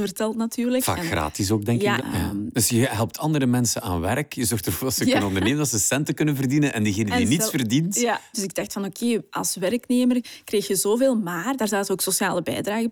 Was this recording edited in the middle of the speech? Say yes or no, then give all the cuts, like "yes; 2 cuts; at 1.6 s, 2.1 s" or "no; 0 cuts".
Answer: yes; 2 cuts; at 2.0 s, 8.3 s